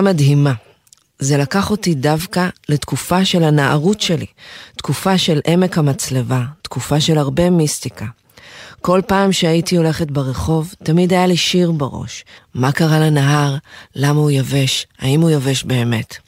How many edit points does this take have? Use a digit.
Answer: 1